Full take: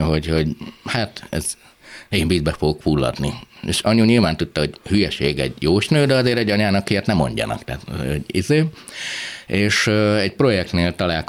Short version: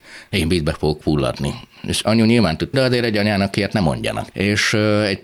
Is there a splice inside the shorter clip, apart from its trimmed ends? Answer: yes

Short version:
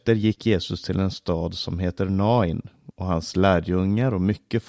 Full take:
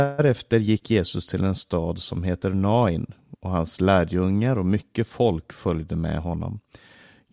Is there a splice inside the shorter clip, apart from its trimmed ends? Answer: no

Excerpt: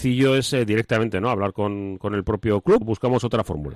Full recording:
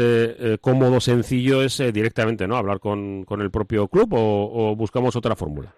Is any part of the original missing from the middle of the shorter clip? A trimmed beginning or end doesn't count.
yes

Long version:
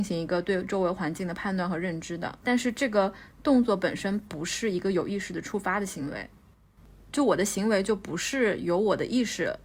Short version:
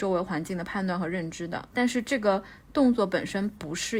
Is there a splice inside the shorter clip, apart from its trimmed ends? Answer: no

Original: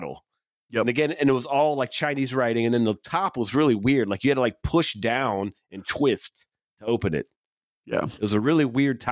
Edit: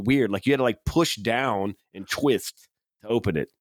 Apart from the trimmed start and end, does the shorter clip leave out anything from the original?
no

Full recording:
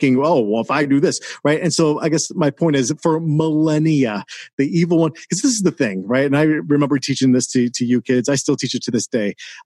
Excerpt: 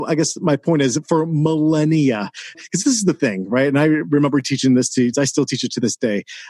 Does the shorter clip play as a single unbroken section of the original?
no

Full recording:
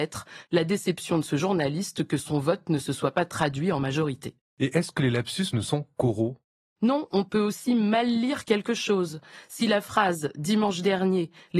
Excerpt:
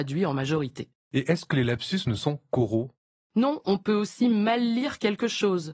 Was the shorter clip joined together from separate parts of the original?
no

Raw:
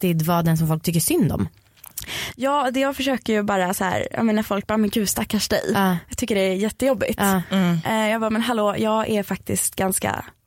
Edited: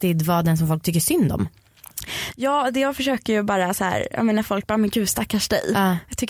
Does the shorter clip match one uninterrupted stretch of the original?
yes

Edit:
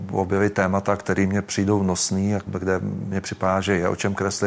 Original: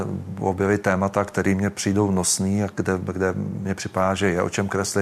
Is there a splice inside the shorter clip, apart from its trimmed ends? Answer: yes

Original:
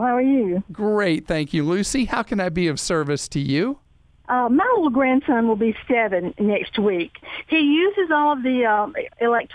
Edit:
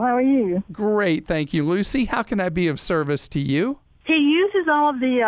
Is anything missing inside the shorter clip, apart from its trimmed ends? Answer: yes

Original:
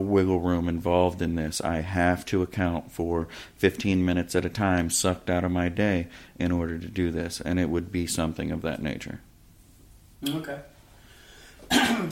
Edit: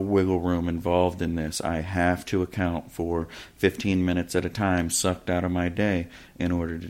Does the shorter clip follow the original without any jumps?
yes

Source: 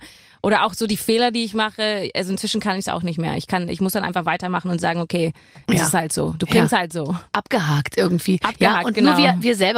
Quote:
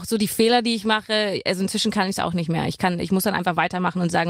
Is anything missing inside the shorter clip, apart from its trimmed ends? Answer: no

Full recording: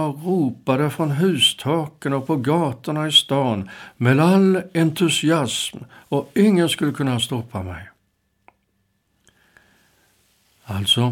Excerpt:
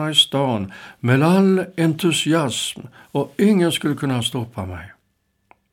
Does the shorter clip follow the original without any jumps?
yes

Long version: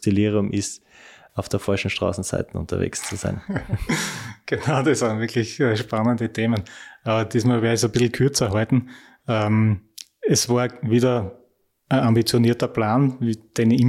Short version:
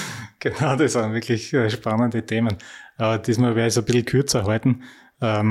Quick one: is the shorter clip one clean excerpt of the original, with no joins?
yes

